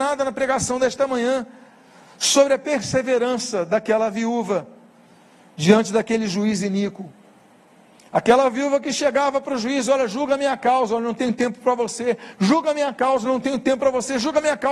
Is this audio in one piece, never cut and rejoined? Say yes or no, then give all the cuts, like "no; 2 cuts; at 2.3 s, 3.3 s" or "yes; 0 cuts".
yes; 0 cuts